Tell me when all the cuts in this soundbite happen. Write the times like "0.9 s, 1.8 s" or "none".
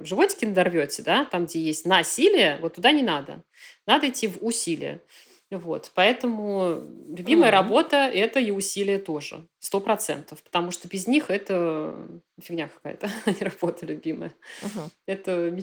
none